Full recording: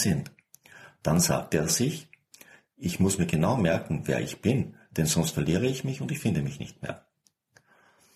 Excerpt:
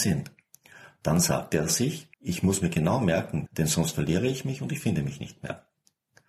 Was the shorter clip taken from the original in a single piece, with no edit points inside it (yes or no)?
no